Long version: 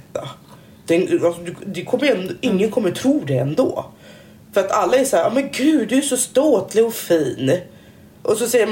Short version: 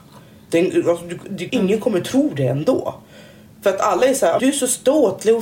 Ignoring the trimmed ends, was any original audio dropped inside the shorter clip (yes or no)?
yes